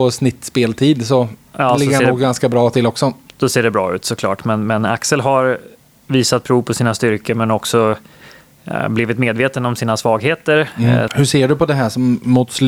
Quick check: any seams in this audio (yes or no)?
yes